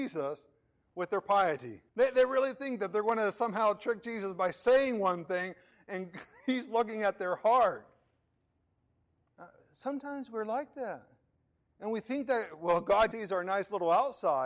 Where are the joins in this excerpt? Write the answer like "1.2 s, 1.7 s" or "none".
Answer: 1.9 s, 9.3 s, 13.1 s